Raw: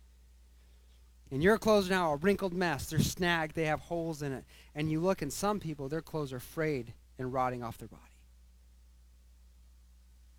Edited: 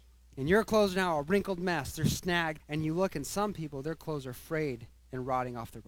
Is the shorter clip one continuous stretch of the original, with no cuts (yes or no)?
no